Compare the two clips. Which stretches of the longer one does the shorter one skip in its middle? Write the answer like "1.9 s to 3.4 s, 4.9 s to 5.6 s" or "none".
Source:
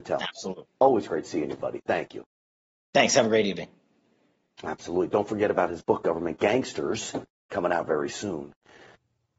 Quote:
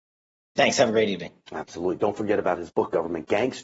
3.8 s to 4.5 s